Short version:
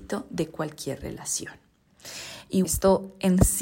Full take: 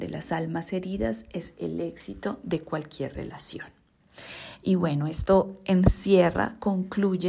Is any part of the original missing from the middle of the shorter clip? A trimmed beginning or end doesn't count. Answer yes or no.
yes